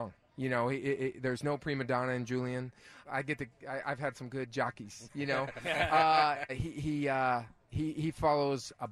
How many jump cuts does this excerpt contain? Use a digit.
2